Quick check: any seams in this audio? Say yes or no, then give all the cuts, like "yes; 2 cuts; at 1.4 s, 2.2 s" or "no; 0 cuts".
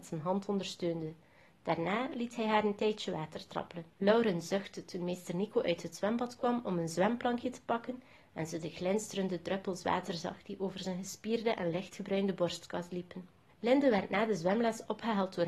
yes; 2 cuts; at 3.9 s, 13.5 s